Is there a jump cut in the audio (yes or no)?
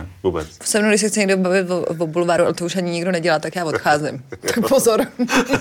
no